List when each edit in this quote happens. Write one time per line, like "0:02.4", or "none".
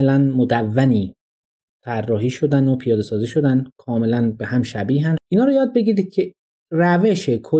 0:05.2